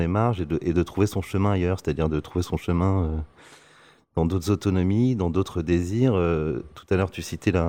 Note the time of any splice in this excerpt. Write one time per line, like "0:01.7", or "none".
none